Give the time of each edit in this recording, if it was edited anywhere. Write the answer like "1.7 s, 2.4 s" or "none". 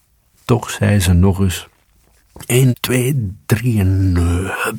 2.7 s

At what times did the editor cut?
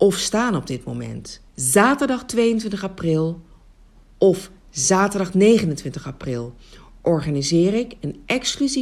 1.5 s

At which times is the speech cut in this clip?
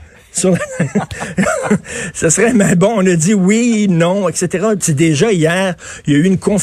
4.8 s

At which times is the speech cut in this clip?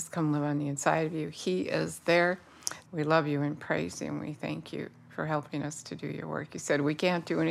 2.9 s

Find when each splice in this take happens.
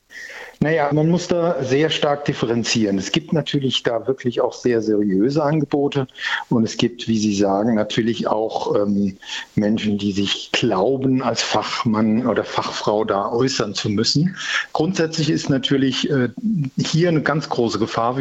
0.9 s

